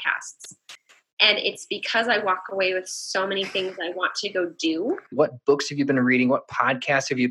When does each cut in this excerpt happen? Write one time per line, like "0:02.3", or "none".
0:05.1